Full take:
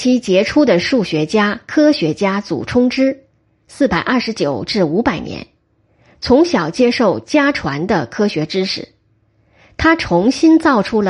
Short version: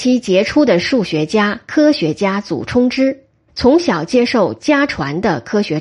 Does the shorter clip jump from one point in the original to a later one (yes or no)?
yes